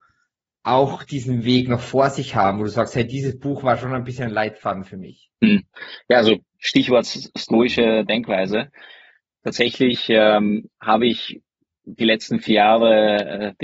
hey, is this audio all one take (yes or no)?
yes